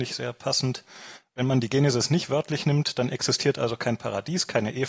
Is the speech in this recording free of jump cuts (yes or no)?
yes